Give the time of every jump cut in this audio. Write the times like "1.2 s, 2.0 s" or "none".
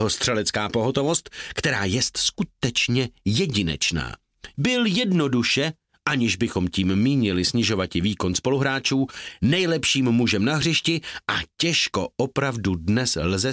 4.5 s

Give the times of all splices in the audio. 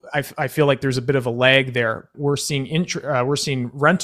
2.1 s

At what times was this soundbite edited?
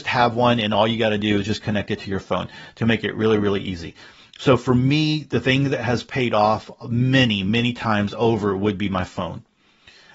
none

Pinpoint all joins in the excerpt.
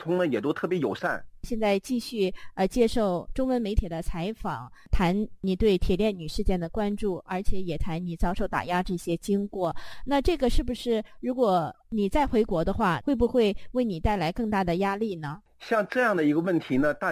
1.4 s, 13.0 s

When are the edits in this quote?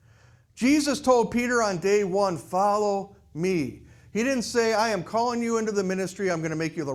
none

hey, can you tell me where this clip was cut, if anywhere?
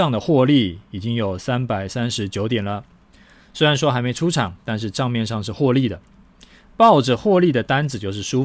none

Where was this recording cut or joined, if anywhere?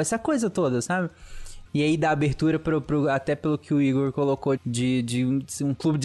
1.7 s, 4.6 s

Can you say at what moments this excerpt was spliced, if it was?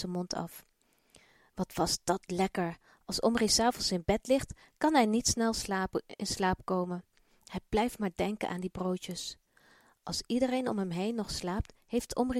none

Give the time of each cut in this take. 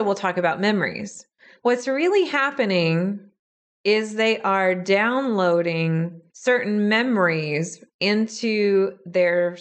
1.6 s, 6.3 s

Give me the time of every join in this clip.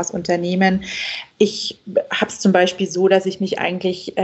1.3 s

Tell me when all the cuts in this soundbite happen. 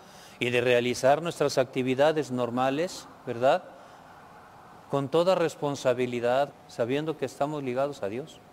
6.5 s

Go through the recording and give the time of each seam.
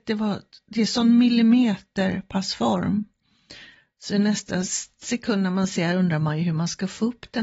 none

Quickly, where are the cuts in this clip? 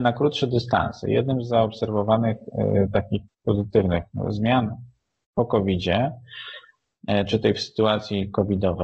3.3 s

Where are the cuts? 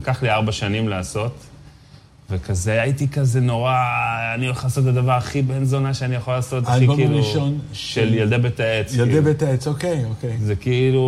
none

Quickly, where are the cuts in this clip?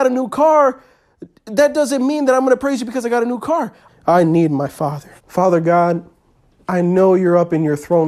3.9 s, 5.2 s

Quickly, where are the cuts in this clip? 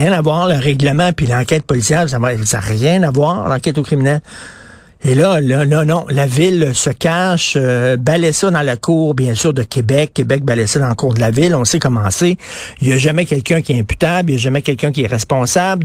none

